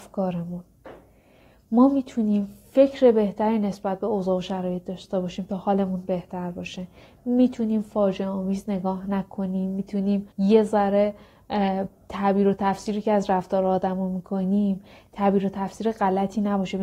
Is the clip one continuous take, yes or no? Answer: no